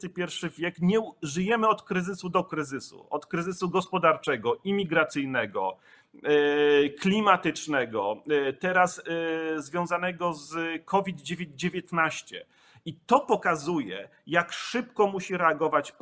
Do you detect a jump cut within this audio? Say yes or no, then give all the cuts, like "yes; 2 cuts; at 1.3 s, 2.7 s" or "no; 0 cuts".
no; 0 cuts